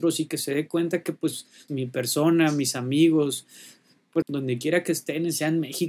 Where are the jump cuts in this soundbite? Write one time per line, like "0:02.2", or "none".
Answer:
0:01.7
0:04.2

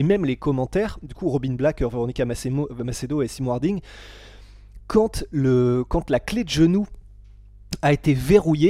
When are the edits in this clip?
none

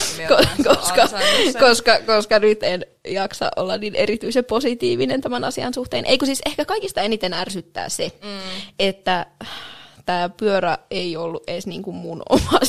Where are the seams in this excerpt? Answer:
none

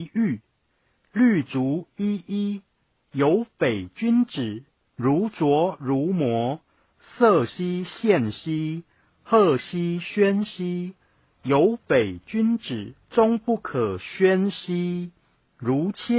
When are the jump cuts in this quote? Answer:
0:04.8
0:13.0

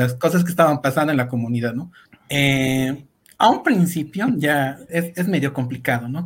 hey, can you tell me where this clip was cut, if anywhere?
0:02.1
0:04.9

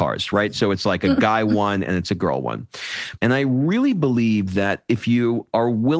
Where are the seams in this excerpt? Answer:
0:03.2

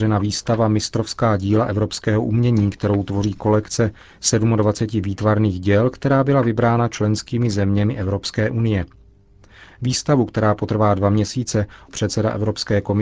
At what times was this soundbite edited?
0:11.9

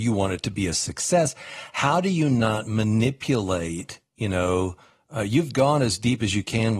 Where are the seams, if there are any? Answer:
none

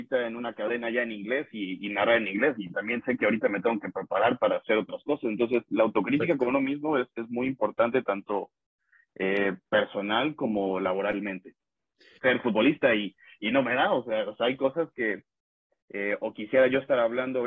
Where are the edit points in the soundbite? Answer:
0:12.2

